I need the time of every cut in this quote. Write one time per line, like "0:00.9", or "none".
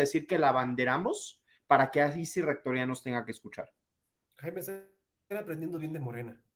none

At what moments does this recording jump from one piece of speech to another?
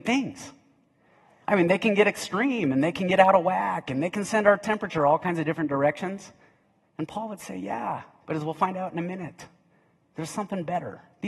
0:06.8

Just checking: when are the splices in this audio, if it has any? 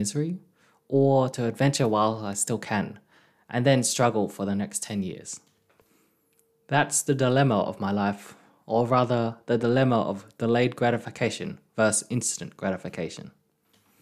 none

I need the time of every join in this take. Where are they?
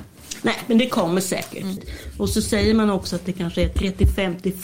0:01.8

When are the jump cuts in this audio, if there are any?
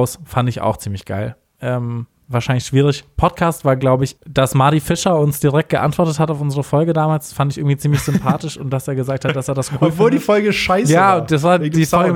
0:04.2

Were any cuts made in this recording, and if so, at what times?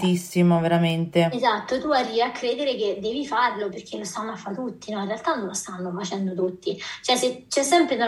0:03.7

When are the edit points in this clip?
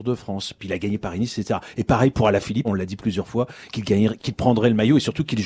0:02.6
0:04.2

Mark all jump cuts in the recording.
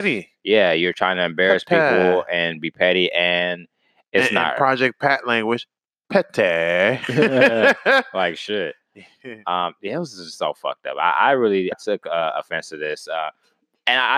0:11.7

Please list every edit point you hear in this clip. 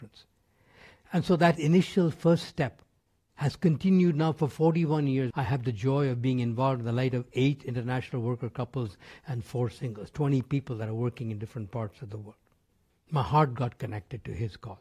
0:05.3
0:12.9

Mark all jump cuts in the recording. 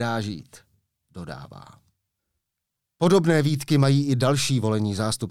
none

